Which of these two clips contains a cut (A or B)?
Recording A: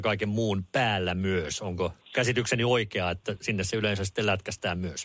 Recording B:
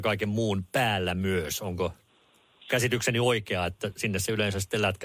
A